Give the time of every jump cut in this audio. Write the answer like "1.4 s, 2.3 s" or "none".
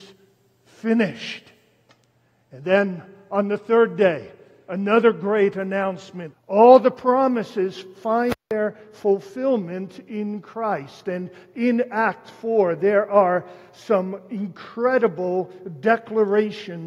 6.3 s